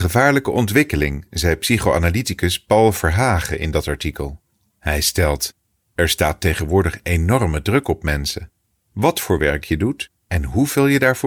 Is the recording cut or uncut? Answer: uncut